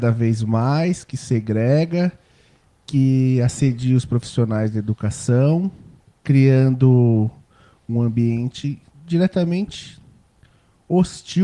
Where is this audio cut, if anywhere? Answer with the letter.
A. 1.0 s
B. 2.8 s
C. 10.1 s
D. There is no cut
D